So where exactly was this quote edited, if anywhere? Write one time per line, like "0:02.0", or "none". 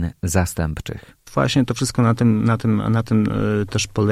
0:01.3